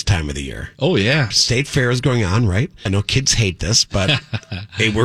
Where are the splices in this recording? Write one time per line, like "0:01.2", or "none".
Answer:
0:01.3
0:02.9

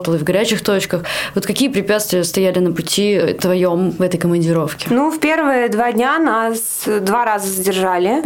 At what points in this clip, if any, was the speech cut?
none

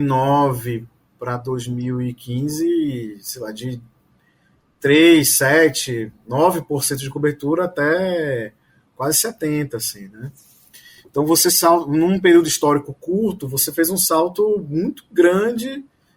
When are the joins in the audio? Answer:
none

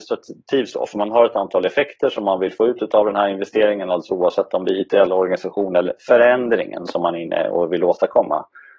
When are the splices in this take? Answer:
none

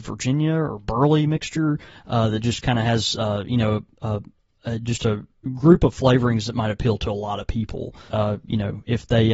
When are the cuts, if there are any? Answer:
0:08.1

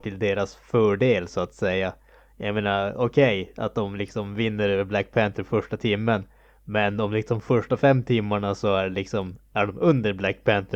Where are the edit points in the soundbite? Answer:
none

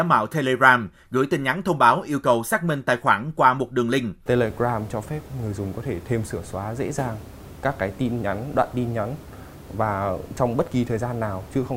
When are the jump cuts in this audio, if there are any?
0:04.3

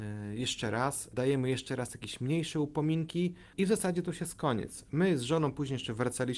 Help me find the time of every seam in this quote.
0:03.5

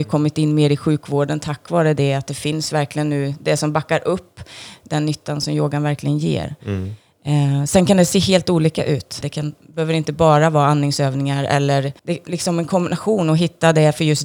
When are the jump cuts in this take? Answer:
0:09.2
0:12.0

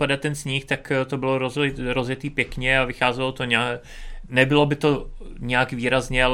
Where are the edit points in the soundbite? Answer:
none

